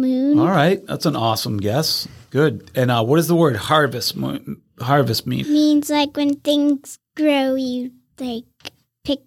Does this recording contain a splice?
yes; 1 cut; at 5.4 s

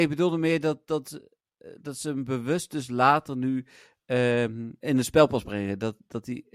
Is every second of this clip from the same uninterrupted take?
no; 1 cut; at 4.8 s

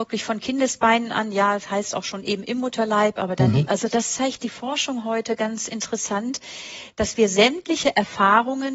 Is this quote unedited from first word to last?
no; 1 cut; at 3.7 s

